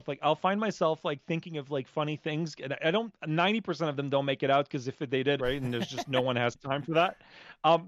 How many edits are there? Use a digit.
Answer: 1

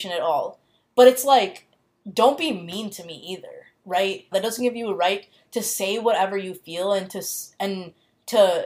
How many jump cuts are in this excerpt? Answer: 1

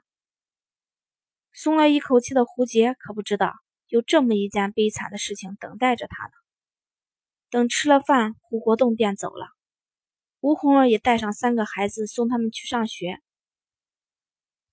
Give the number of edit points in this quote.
0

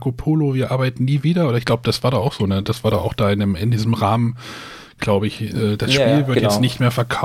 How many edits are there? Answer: 0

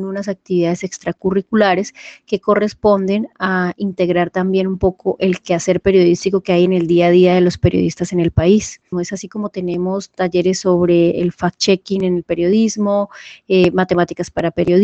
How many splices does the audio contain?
1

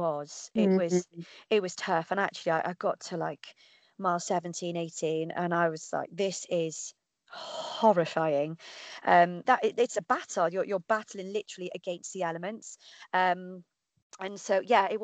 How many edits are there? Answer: 1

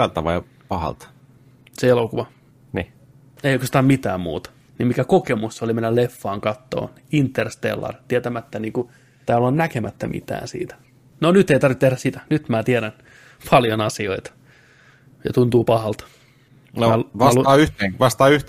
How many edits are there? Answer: 1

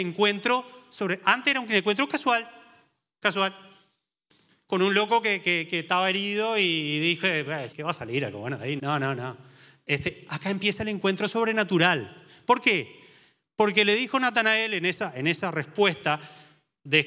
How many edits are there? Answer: 2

